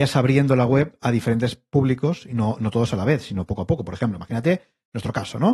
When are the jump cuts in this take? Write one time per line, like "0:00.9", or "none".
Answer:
none